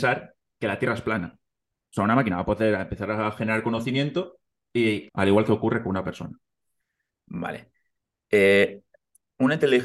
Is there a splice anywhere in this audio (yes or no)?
yes